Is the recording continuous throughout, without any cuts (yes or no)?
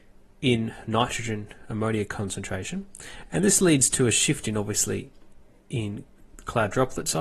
yes